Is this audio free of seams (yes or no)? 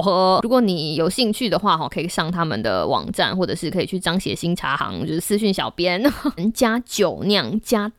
no